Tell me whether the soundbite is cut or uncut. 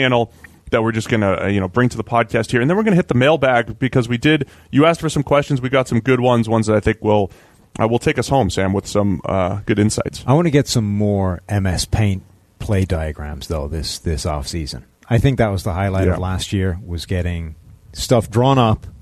uncut